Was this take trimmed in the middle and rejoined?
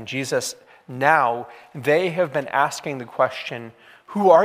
no; 0 cuts

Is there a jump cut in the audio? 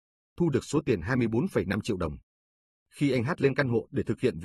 no; 0 cuts

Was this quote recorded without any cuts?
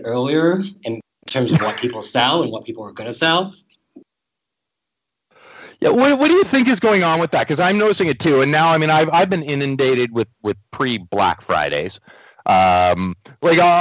yes; 0 cuts

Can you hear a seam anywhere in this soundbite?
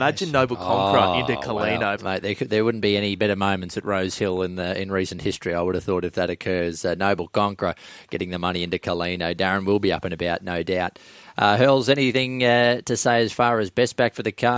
yes; 1 cut; at 2.0 s

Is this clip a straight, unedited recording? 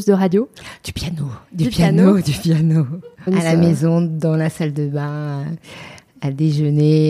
no; 1 cut; at 3.3 s

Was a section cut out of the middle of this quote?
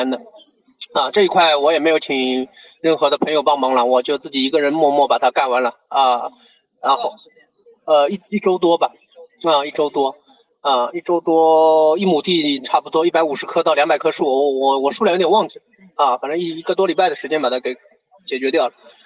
no; 0 cuts

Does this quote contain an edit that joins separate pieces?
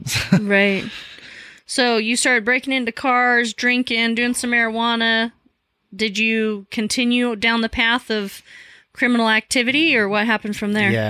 no; 0 cuts

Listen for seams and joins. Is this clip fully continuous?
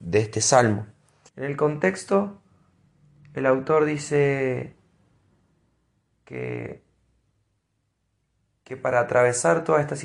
no; 1 cut; at 1.3 s

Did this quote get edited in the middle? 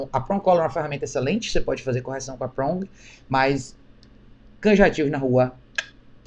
no; 0 cuts

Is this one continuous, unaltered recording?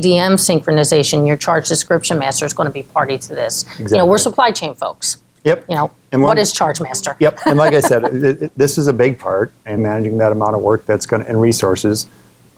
no; 1 cut; at 9.8 s

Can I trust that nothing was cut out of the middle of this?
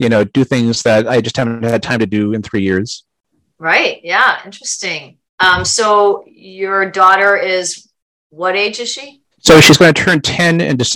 no; 2 cuts; at 5.3 s, 9.3 s

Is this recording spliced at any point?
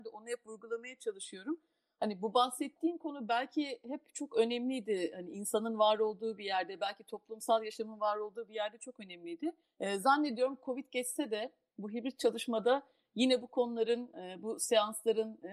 yes; 1 cut; at 9.6 s

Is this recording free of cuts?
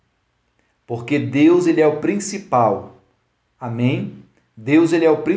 yes; 0 cuts

